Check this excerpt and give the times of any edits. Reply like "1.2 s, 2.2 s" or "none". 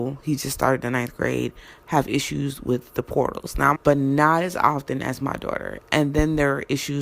3.8 s